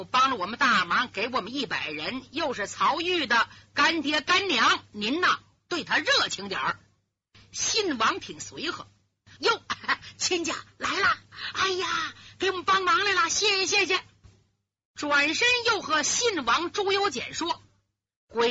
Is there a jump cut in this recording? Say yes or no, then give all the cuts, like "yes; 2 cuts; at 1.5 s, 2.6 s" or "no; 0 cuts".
yes; 1 cut; at 9.4 s